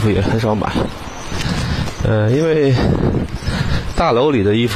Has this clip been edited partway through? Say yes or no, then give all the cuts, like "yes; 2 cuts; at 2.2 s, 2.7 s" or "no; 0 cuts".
no; 0 cuts